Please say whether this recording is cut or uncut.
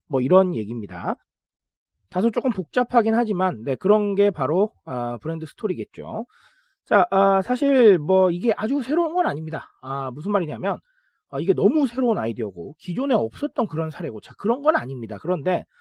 uncut